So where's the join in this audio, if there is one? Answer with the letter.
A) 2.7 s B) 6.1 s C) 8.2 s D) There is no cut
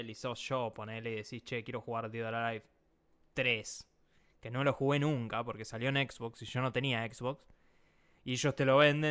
D